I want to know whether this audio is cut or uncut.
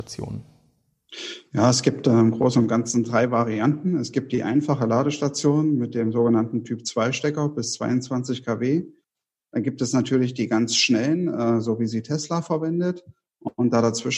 uncut